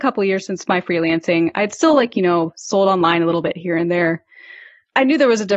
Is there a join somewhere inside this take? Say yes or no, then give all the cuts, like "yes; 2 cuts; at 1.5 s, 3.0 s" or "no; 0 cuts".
no; 0 cuts